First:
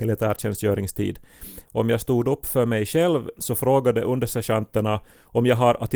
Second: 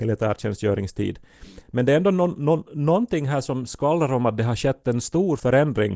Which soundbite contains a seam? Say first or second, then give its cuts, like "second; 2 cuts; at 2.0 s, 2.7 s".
first; 2 cuts; at 1.6 s, 3.3 s